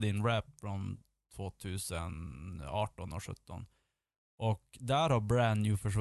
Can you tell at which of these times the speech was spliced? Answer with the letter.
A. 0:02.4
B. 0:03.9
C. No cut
C